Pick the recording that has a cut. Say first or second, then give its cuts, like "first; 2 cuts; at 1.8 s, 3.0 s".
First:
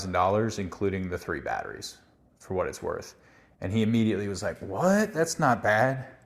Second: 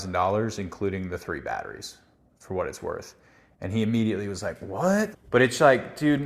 second; 1 cut; at 5.1 s